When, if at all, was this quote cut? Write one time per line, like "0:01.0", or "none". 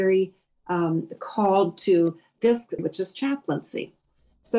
0:02.8